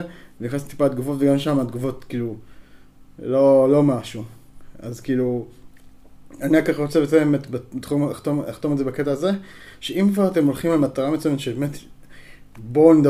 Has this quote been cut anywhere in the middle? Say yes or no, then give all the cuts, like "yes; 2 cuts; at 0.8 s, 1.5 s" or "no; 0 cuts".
no; 0 cuts